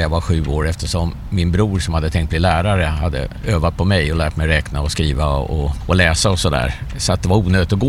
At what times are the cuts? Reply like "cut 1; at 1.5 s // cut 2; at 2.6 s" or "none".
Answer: none